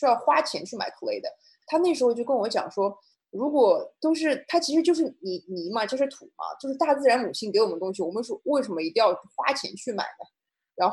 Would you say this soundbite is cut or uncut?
uncut